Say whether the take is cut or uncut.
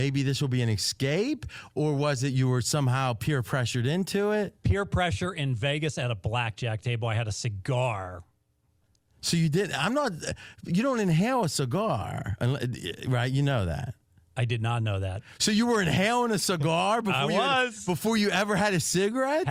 uncut